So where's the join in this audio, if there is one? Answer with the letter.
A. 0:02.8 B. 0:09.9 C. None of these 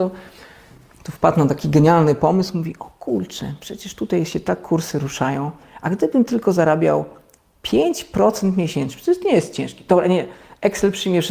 C